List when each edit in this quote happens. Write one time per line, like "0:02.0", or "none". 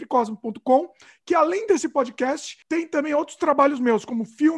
none